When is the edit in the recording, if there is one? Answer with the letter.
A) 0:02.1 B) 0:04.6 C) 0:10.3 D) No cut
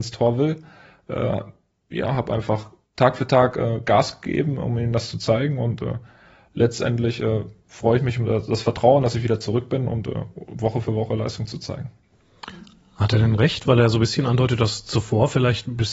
C